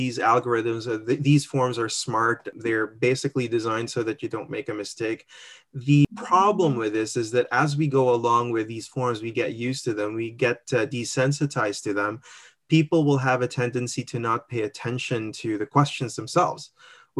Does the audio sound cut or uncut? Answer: uncut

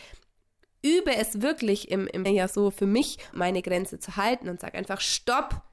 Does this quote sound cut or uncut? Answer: cut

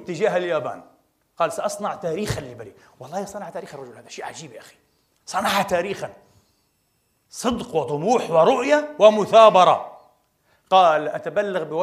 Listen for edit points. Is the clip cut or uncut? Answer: uncut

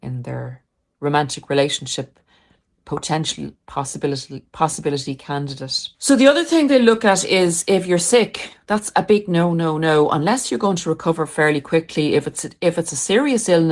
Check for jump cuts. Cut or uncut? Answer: cut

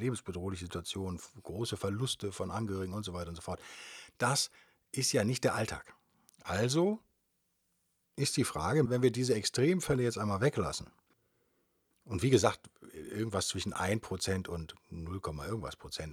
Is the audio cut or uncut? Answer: cut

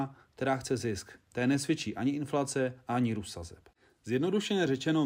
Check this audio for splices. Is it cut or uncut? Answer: uncut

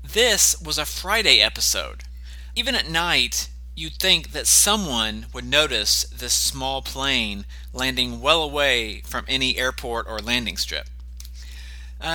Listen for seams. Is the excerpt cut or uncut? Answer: cut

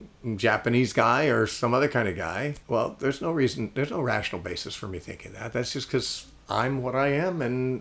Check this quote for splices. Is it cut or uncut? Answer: cut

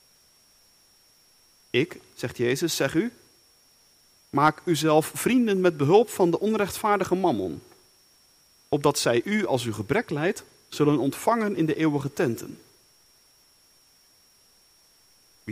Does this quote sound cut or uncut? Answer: uncut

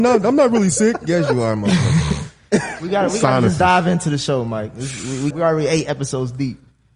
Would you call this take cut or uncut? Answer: cut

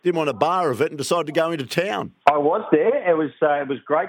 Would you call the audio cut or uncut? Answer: cut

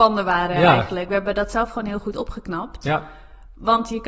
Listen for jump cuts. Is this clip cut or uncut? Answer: uncut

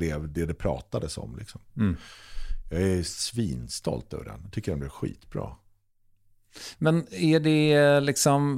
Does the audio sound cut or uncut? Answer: uncut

